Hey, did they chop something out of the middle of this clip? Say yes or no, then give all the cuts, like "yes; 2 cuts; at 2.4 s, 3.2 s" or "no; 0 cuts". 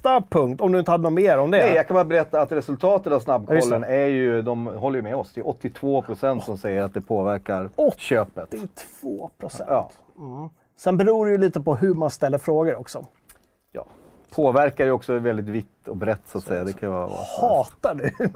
no; 0 cuts